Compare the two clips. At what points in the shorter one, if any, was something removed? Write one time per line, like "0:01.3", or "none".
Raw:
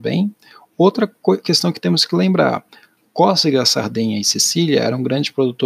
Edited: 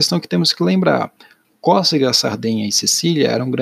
none